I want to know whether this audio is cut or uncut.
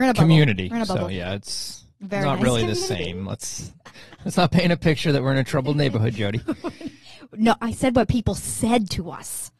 uncut